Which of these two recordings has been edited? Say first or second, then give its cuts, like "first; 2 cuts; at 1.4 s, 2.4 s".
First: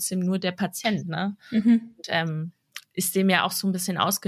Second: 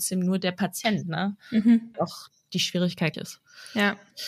second; 2 cuts; at 1.9 s, 3.1 s